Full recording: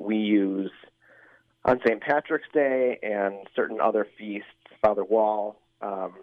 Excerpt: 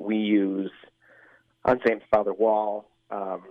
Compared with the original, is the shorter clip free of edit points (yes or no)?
no